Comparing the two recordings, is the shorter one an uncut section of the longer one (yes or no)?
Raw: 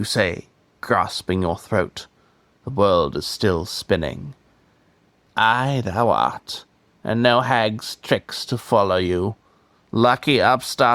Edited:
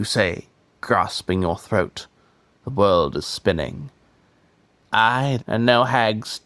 no